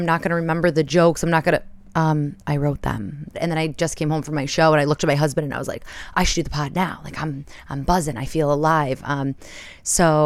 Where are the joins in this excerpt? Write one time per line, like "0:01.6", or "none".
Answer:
0:03.3